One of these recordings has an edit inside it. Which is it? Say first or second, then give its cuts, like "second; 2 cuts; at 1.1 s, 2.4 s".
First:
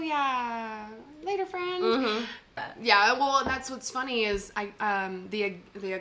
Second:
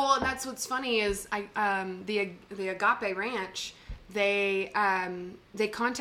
first; 1 cut; at 2.6 s